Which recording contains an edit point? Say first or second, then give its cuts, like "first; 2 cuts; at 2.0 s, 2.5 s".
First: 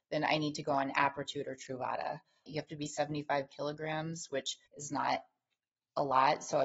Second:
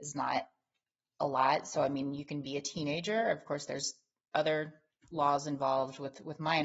first; 2 cuts; at 2.5 s, 4.7 s